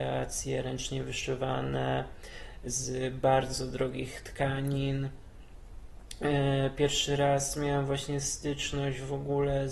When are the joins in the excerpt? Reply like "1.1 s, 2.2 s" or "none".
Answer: none